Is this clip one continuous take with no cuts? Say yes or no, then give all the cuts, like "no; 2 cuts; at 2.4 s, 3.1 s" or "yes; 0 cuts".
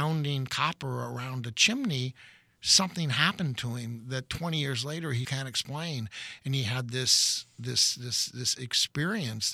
no; 1 cut; at 5.2 s